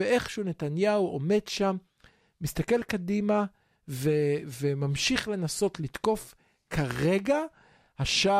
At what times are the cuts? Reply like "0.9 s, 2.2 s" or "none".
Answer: none